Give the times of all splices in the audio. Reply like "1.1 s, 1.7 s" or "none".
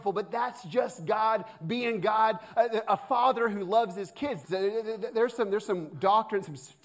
4.4 s